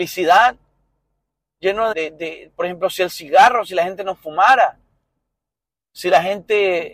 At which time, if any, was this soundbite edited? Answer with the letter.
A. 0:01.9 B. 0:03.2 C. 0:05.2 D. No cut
A